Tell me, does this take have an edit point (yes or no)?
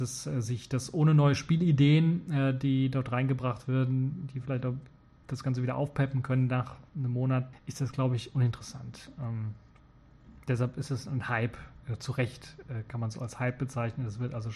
yes